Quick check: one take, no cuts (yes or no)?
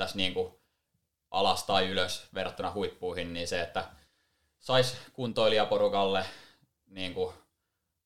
yes